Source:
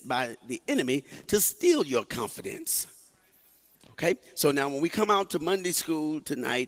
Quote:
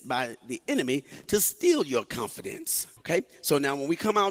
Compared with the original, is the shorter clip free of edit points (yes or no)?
no